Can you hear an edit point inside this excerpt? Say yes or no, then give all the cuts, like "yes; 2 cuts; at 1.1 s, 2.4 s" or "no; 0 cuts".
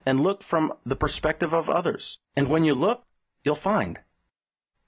yes; 1 cut; at 2.3 s